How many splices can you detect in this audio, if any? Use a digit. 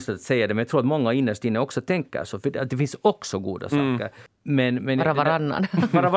1